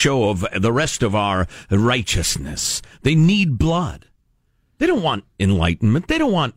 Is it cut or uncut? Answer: uncut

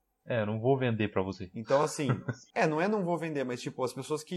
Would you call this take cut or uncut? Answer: uncut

